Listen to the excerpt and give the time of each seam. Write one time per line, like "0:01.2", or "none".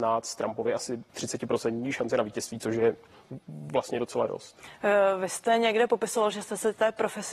0:01.1